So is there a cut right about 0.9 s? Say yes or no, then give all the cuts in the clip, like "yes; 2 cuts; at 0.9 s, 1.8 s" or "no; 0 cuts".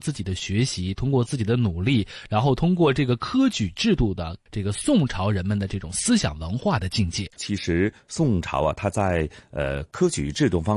no; 2 cuts; at 4.5 s, 7.4 s